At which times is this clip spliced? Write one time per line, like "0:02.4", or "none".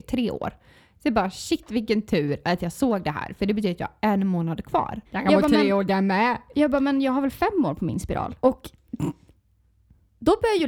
0:05.0
0:08.4